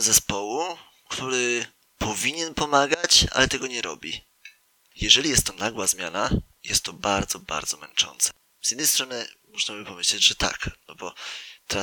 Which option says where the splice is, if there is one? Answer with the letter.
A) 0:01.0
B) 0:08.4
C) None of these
B